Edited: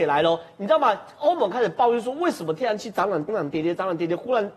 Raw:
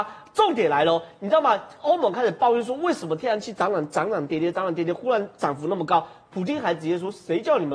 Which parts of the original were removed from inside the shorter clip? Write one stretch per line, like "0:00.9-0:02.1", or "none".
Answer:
0:03.9-0:04.1